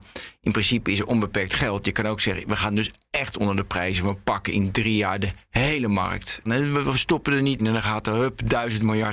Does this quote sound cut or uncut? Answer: cut